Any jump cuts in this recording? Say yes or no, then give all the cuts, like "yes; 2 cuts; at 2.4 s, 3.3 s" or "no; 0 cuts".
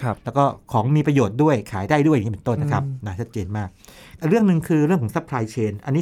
yes; 1 cut; at 2.6 s